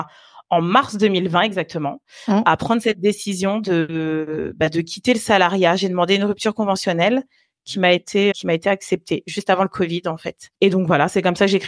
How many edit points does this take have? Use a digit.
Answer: 1